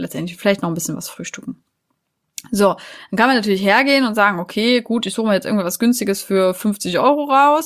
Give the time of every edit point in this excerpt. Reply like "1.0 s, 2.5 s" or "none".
none